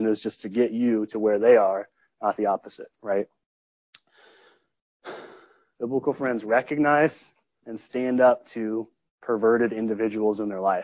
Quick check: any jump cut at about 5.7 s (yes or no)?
yes